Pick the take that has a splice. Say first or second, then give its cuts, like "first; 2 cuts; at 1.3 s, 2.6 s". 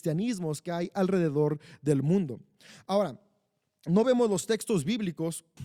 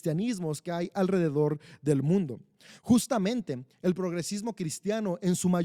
second; 1 cut; at 2.8 s